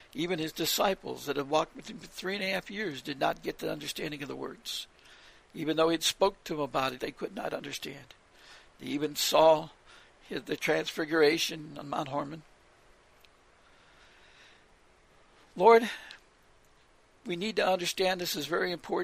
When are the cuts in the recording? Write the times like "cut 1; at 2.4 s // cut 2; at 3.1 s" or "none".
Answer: cut 1; at 7.0 s